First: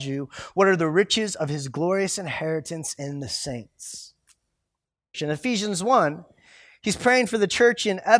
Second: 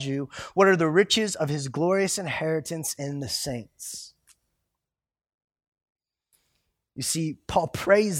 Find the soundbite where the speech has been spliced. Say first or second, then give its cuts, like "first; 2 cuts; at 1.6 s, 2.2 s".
first; 1 cut; at 5.1 s